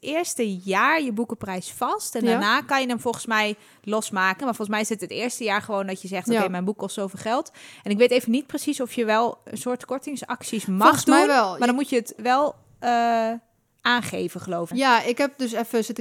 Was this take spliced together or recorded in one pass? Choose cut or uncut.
cut